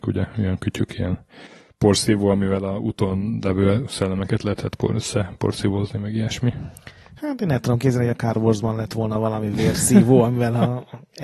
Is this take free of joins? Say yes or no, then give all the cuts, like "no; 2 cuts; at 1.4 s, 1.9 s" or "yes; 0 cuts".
yes; 0 cuts